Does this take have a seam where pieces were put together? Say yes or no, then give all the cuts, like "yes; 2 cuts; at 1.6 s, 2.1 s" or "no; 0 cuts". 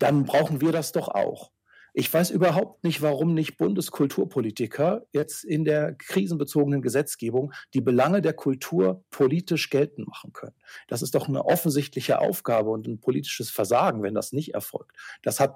no; 0 cuts